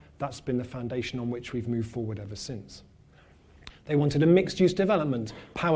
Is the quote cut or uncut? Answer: cut